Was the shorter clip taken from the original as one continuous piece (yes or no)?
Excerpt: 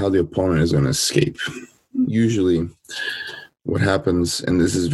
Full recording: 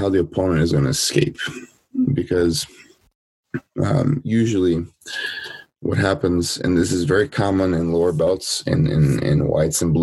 no